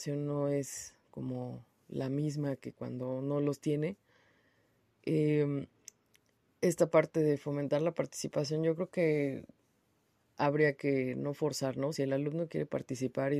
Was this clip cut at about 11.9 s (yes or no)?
no